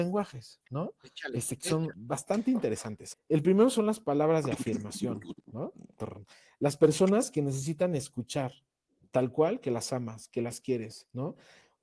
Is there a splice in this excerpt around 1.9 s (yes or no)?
yes